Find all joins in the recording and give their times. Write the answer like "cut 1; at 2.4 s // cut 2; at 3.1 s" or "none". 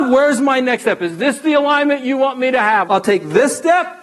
cut 1; at 2.9 s